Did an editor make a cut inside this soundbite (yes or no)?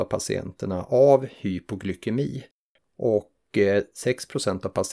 yes